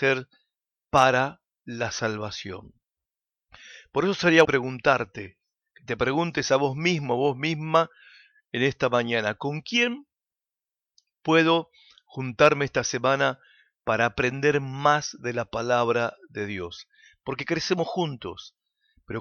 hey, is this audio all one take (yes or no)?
no